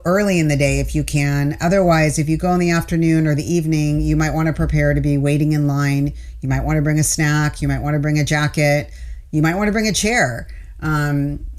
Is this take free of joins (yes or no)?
yes